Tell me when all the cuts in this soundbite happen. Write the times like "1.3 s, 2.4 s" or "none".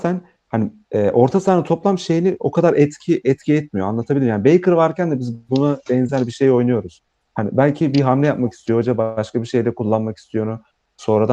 none